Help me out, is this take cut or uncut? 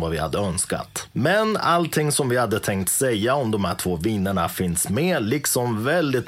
uncut